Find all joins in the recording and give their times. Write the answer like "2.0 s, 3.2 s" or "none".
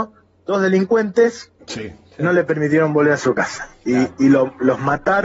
1.6 s